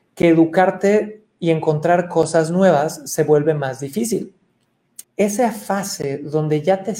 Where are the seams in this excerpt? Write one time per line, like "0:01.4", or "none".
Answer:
0:05.0

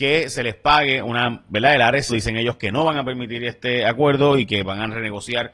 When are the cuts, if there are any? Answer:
0:02.1

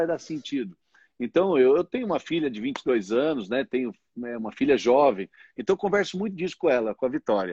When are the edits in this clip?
none

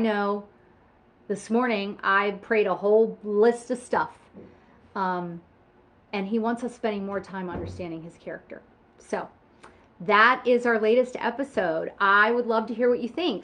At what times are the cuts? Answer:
none

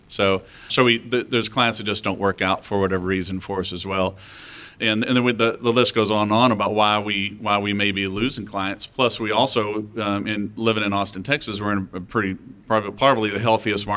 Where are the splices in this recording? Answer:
none

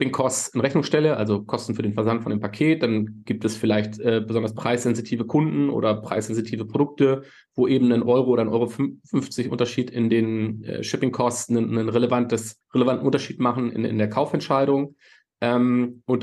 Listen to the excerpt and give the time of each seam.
0:12.6

